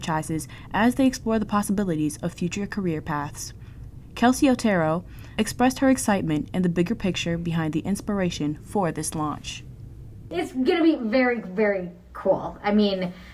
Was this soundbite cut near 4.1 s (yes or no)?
no